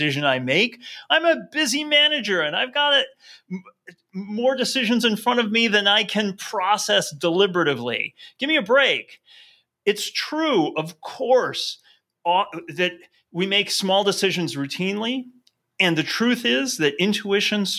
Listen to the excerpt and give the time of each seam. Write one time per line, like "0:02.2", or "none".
0:12.1